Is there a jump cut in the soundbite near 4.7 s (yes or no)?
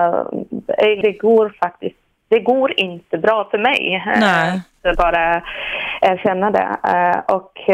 no